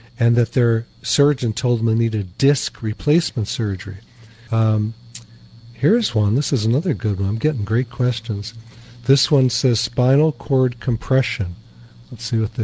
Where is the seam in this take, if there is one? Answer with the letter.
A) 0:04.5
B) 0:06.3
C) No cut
A